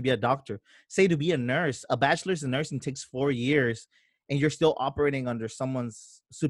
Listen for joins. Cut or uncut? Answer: uncut